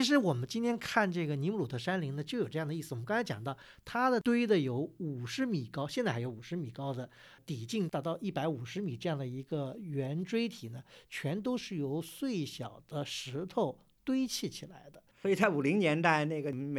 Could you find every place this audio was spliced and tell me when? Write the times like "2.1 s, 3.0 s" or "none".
15.1 s